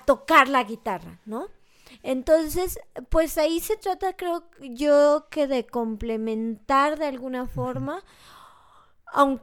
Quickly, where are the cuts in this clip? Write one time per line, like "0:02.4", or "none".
none